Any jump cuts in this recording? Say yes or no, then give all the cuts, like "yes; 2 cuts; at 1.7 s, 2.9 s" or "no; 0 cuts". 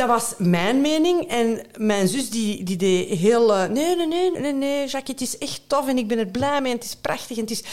yes; 1 cut; at 4.3 s